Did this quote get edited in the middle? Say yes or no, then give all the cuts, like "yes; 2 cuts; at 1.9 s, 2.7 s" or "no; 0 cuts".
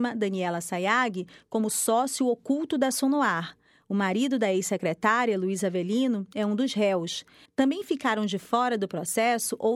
yes; 1 cut; at 7.5 s